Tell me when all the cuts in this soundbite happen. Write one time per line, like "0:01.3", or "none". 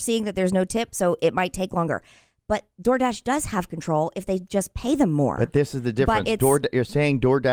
none